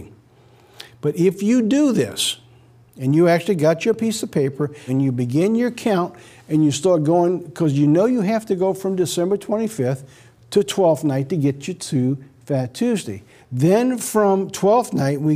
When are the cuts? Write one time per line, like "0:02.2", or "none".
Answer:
0:04.9
0:13.4